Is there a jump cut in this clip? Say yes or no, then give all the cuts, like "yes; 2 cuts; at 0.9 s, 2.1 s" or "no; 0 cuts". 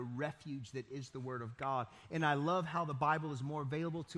no; 0 cuts